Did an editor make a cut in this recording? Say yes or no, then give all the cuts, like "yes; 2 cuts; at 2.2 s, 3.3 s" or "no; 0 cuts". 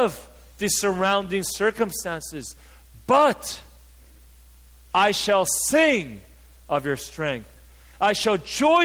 no; 0 cuts